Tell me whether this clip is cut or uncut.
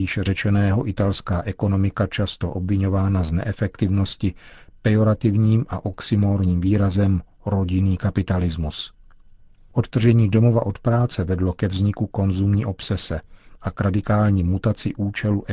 uncut